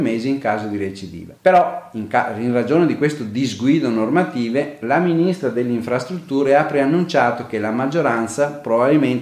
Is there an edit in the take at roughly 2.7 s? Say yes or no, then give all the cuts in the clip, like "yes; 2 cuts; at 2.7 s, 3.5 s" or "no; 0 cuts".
no; 1 cut; at 1.4 s